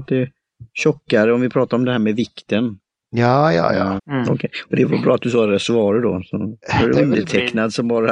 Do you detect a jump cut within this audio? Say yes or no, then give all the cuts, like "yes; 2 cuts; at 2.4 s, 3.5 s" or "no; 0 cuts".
yes; 2 cuts; at 4.0 s, 6.6 s